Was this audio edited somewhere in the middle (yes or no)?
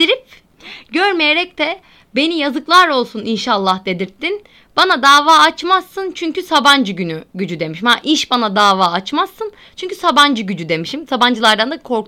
no